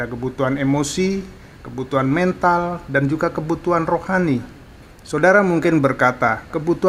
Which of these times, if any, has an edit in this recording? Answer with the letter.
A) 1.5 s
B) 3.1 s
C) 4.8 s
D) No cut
C